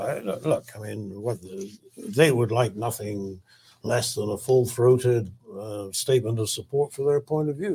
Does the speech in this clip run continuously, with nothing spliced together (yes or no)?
yes